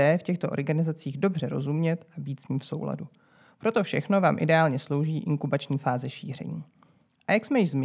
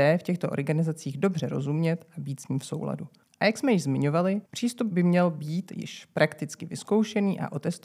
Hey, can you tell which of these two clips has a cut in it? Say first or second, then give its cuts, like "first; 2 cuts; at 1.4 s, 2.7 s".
second; 2 cuts; at 3.2 s, 4.5 s